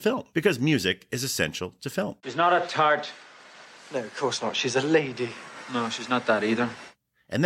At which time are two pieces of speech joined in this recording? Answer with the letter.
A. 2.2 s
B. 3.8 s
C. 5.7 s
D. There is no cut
A